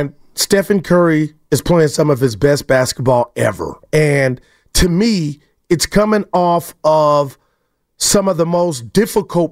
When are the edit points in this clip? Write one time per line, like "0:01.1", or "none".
0:03.8